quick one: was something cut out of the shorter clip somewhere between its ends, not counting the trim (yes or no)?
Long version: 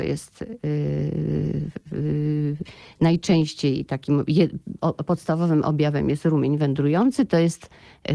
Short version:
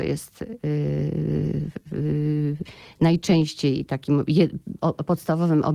no